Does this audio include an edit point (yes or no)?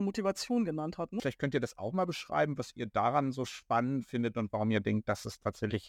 yes